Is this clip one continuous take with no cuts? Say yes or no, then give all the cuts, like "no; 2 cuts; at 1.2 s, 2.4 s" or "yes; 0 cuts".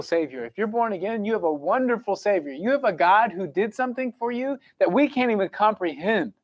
yes; 0 cuts